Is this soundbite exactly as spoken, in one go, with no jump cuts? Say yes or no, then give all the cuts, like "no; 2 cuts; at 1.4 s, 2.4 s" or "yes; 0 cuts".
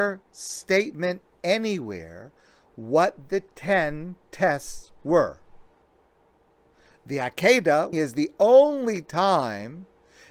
no; 1 cut; at 7.9 s